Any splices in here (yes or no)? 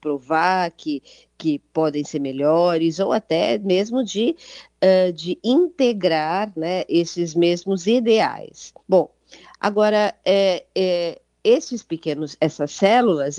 yes